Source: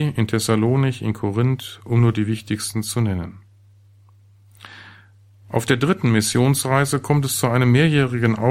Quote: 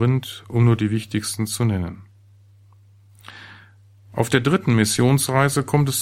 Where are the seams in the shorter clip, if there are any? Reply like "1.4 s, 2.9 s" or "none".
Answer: none